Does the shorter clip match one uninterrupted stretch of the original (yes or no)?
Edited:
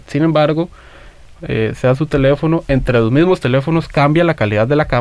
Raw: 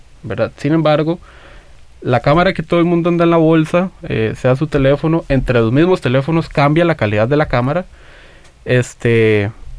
no